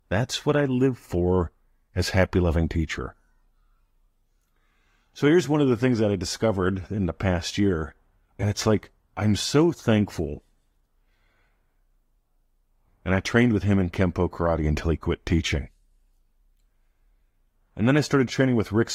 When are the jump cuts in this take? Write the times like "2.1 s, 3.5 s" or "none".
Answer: 8.3 s, 12.9 s